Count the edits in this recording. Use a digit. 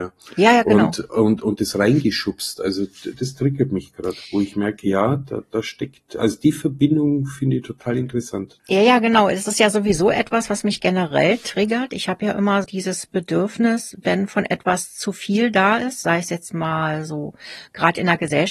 2